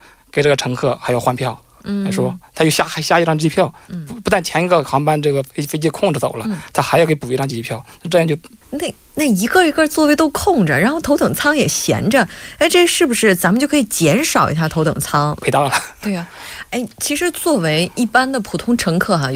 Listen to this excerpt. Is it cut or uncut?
cut